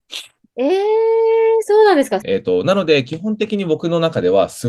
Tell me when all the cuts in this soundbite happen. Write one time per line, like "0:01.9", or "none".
0:02.2